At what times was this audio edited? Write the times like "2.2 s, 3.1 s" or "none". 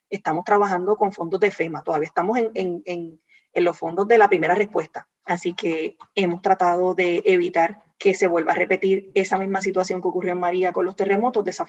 5.2 s, 7.9 s

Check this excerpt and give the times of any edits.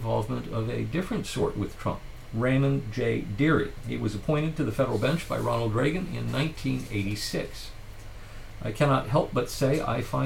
2.3 s

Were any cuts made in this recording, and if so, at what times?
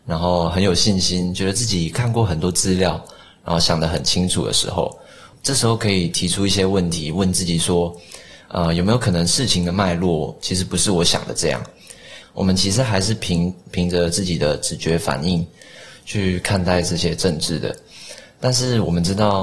12.2 s

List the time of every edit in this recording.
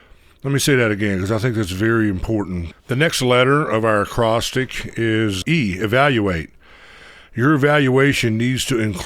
2.7 s, 5.4 s

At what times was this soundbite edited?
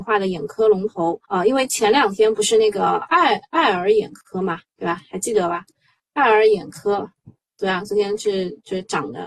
1.2 s

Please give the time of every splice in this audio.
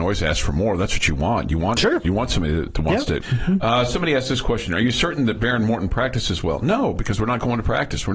3.2 s

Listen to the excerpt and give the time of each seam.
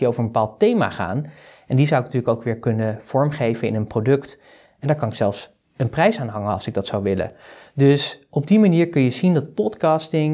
none

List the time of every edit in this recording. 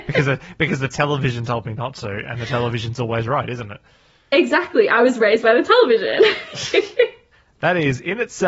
none

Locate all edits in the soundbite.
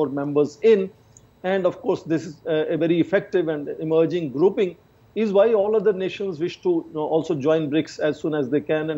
none

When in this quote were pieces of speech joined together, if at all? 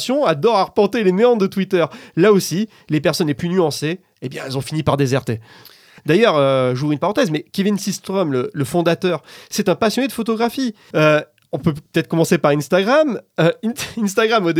6.0 s, 10.9 s

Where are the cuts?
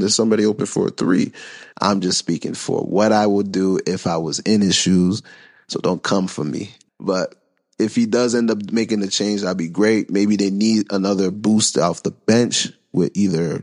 1.7 s, 6.9 s

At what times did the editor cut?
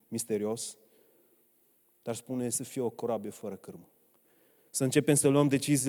4.6 s

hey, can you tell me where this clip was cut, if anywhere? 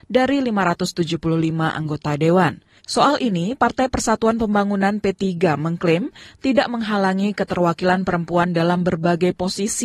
2.8 s

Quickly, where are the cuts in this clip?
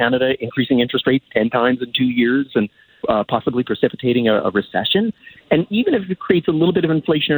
3.0 s, 5.4 s

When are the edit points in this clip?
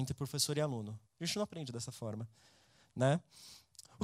1.0 s

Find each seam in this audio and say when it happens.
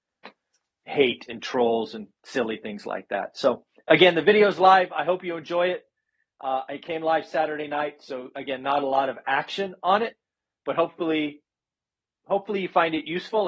none

